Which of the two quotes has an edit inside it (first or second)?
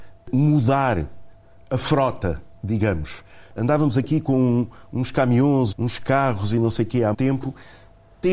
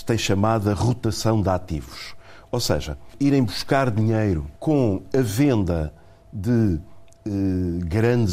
first